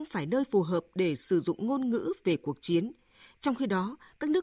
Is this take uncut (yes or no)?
yes